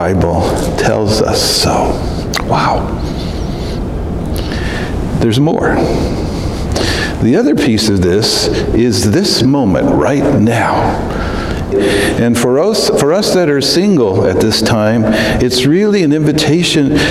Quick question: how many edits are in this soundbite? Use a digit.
1